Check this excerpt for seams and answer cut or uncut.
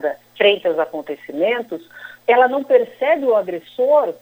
uncut